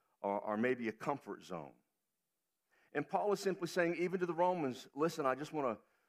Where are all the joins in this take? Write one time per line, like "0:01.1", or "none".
none